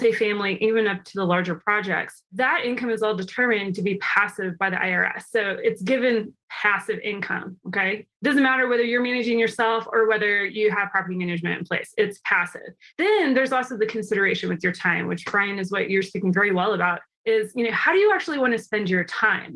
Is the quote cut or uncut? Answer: uncut